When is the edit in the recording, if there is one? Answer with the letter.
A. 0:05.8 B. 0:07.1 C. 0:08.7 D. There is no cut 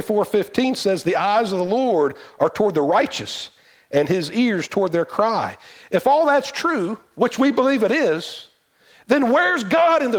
D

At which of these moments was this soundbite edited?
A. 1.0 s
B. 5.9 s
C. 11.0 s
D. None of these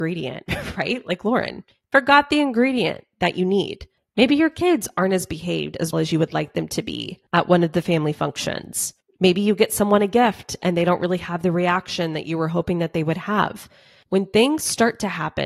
B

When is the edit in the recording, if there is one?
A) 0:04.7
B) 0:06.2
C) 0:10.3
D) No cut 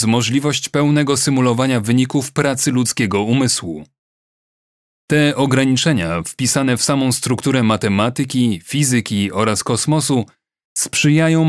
D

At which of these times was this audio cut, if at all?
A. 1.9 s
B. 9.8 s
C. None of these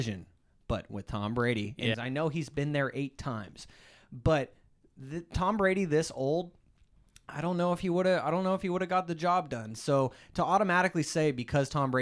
A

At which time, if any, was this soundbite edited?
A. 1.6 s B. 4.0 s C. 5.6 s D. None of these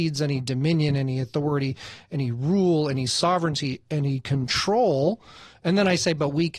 D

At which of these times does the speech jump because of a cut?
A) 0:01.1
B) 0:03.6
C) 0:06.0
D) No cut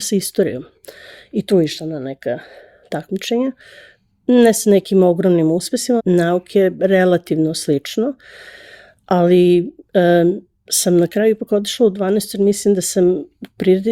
C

